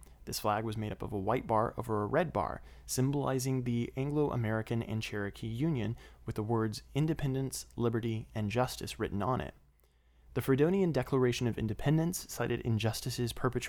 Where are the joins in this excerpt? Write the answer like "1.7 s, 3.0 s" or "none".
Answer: none

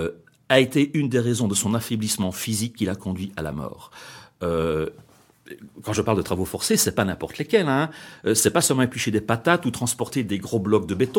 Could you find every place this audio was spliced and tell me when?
none

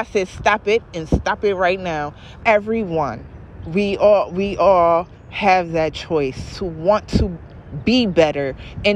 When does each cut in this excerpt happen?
2.4 s, 3.6 s, 6.5 s

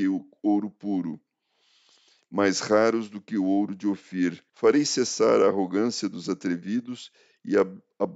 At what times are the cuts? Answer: 4.5 s

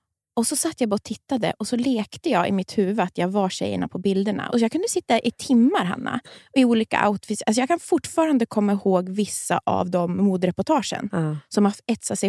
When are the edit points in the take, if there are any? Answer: 4.5 s

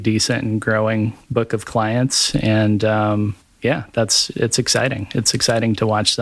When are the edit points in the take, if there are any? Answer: 4.3 s

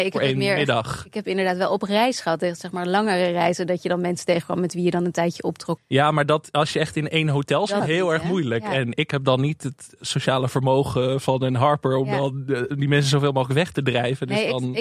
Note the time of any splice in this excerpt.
5.8 s, 7.8 s

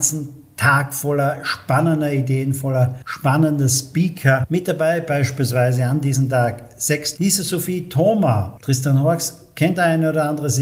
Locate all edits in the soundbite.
7.1 s, 8.6 s

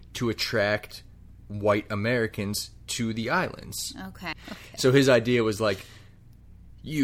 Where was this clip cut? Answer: 4.3 s

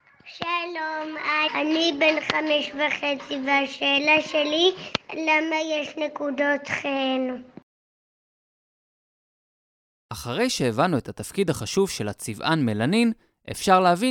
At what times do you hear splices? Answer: 1.5 s

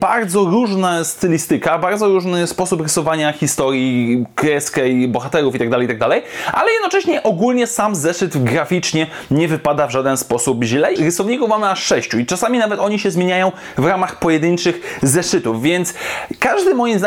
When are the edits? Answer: 11.0 s

